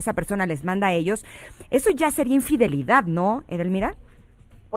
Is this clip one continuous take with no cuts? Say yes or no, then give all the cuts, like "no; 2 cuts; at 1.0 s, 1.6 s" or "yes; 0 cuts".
yes; 0 cuts